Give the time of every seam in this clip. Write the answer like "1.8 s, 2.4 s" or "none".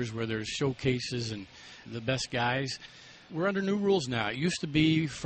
1.9 s, 3.3 s